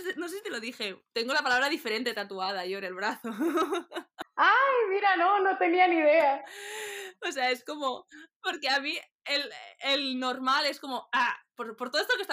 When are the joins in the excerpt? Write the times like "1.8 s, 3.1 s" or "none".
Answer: none